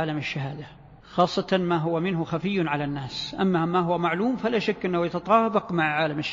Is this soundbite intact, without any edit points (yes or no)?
no